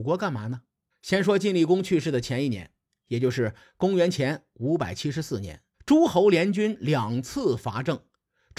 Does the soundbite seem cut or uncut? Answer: cut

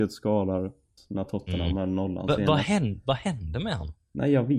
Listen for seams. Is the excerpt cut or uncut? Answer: cut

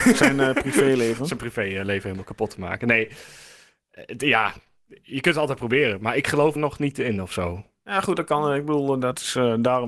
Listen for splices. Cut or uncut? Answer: cut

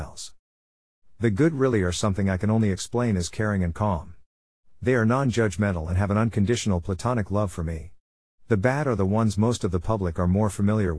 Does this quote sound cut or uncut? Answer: uncut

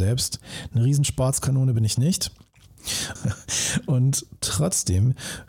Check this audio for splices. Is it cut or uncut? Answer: cut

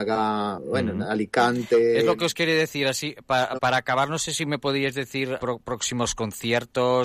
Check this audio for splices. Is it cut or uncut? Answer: cut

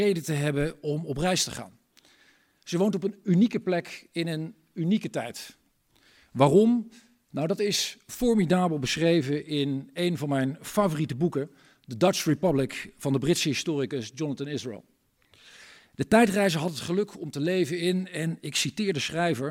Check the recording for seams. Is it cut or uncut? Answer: uncut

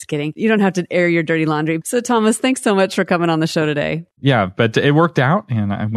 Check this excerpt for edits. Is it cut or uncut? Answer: cut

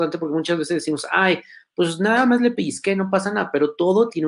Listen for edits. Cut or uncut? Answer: uncut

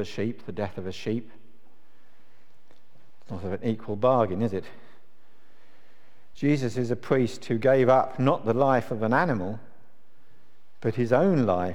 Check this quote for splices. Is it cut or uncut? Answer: uncut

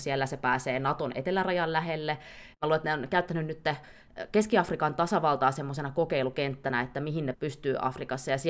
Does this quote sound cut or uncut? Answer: cut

